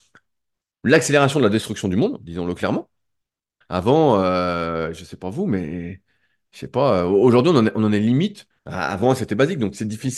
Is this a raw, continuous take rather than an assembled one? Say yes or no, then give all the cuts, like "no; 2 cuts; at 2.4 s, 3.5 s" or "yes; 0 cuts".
no; 2 cuts; at 3.6 s, 8.5 s